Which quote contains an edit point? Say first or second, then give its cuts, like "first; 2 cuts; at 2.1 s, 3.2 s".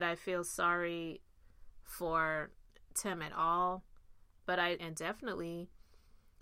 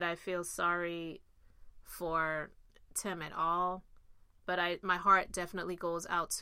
first; 1 cut; at 4.8 s